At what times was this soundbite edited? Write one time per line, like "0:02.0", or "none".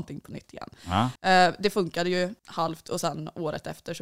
0:01.2
0:02.4